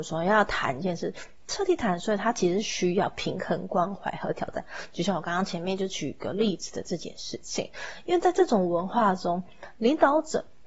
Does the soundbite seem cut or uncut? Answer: uncut